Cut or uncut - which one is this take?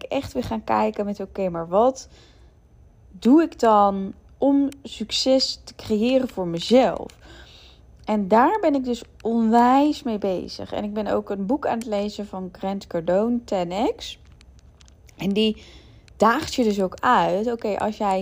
uncut